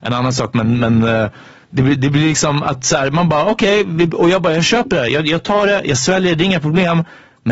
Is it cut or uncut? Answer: uncut